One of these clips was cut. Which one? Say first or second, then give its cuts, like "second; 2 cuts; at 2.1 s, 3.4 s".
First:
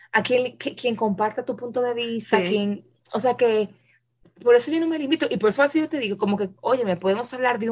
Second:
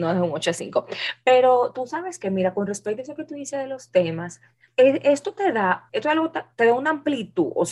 second; 2 cuts; at 4.7 s, 5.9 s